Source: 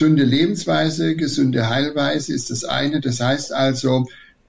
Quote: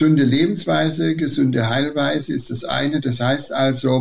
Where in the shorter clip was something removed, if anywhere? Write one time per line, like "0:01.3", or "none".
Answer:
none